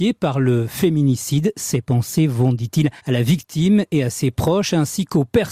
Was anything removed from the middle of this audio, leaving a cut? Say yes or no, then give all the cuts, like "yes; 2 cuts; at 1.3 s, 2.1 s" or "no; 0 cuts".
yes; 1 cut; at 3.0 s